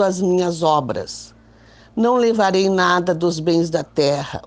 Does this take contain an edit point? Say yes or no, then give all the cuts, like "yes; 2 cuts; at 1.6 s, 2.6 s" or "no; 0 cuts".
no; 0 cuts